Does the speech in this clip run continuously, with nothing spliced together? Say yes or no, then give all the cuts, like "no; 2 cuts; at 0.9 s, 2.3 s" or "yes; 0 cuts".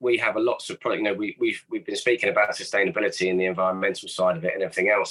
yes; 0 cuts